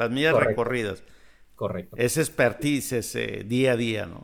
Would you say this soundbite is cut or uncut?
uncut